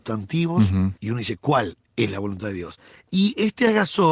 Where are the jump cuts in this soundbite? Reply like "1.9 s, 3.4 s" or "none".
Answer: 1.0 s, 3.0 s